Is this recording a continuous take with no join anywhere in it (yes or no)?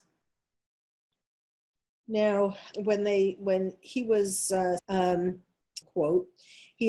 no